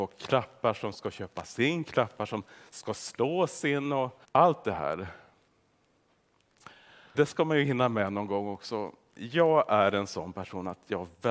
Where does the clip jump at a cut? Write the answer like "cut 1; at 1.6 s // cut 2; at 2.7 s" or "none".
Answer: cut 1; at 4.2 s // cut 2; at 7.1 s

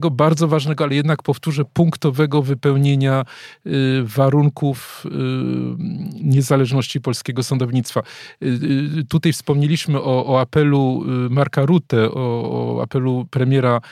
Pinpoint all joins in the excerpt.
none

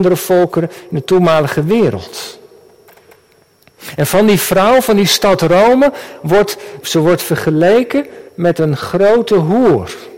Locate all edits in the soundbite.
cut 1; at 6.8 s // cut 2; at 8.3 s

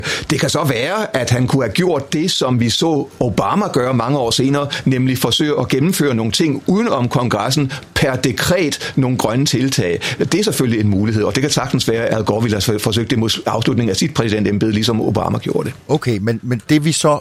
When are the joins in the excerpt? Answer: cut 1; at 12.1 s

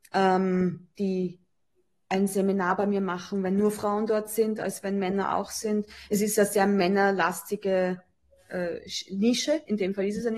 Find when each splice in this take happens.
none

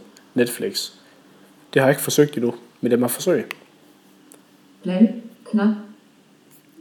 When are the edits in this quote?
none

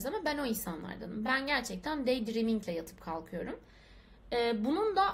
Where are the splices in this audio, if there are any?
none

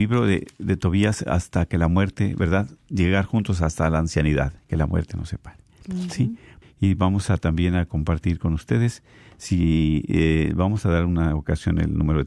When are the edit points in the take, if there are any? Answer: cut 1; at 6.6 s

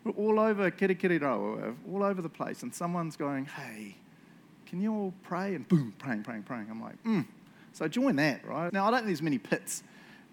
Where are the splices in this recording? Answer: cut 1; at 8.7 s

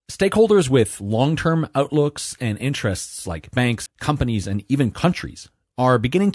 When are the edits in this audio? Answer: cut 1; at 3.9 s

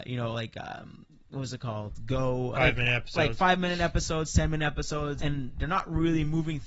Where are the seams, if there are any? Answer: cut 1; at 2.5 s // cut 2; at 5.2 s

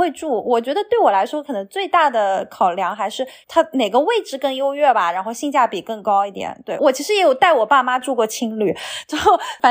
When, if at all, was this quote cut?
cut 1; at 6.8 s

